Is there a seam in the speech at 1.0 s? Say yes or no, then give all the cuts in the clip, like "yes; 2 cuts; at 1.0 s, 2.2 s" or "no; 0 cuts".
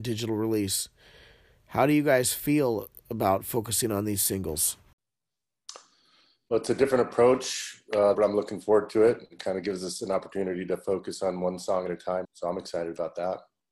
no; 2 cuts; at 8.1 s, 12.2 s